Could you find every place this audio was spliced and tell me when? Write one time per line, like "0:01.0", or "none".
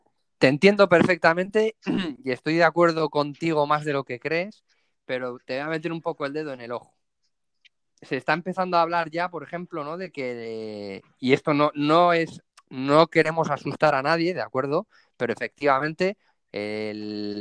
none